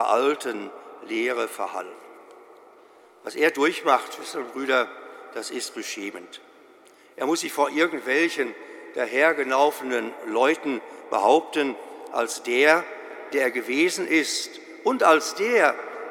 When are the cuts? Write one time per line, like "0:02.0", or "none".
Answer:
none